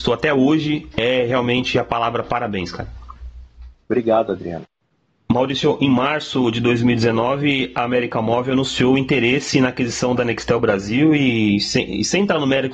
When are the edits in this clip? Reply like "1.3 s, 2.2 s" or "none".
none